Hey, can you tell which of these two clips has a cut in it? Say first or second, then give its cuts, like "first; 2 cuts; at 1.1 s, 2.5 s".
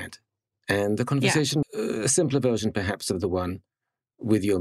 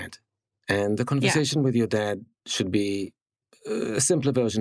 first; 1 cut; at 1.6 s